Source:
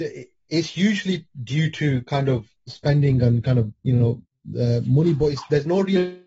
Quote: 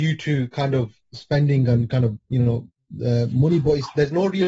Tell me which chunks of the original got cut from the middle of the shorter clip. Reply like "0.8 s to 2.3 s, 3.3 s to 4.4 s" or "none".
none